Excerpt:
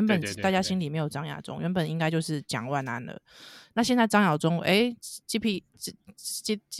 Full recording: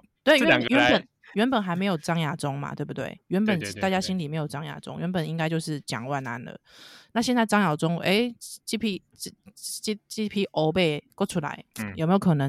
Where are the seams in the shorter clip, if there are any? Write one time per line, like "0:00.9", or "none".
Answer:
none